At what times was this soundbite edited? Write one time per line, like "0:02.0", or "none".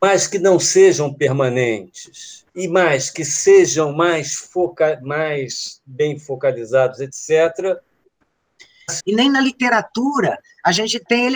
0:02.5
0:09.0